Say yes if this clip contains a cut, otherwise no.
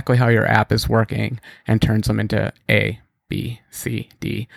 no